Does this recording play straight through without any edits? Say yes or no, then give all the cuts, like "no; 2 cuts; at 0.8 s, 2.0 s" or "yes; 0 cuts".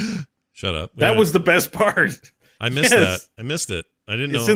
yes; 0 cuts